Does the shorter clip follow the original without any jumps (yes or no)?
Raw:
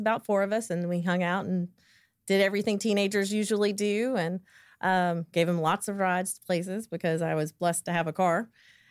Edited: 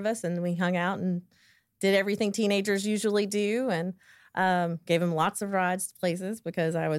yes